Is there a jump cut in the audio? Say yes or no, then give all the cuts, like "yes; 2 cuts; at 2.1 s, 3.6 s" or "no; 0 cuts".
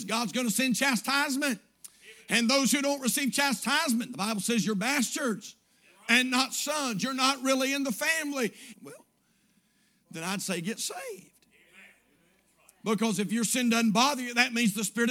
yes; 1 cut; at 8.7 s